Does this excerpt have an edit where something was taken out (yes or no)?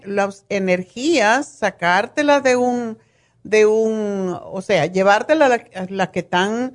no